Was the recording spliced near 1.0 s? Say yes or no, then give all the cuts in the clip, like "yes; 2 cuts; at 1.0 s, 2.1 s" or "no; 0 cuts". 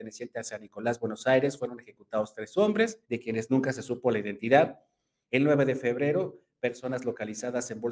no; 2 cuts; at 3.0 s, 5.2 s